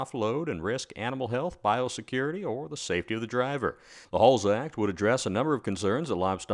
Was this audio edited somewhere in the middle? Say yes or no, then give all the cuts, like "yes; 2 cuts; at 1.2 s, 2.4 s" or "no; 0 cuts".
yes; 1 cut; at 4.0 s